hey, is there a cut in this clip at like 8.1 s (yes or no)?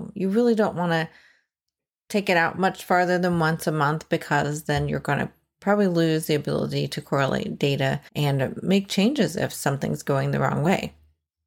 yes